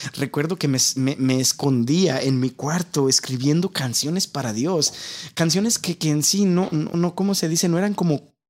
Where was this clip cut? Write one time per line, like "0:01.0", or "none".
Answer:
0:06.9